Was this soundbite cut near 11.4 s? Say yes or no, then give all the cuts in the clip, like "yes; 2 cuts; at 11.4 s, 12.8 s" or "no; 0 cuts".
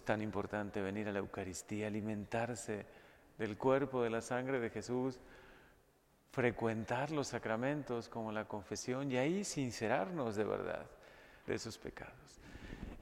yes; 1 cut; at 11.4 s